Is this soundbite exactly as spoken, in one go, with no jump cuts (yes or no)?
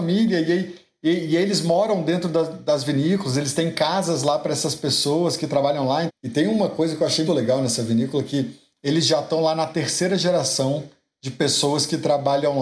no